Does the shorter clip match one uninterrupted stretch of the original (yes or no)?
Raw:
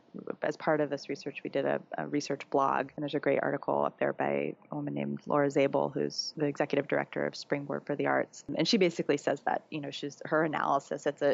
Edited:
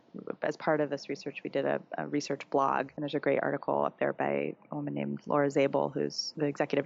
yes